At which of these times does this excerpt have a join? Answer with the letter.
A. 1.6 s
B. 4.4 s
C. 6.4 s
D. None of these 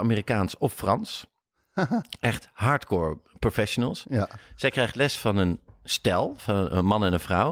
D